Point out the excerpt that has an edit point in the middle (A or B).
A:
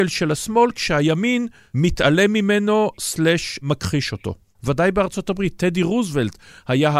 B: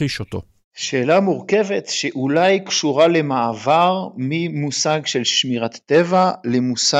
A